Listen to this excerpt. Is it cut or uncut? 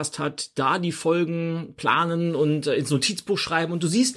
uncut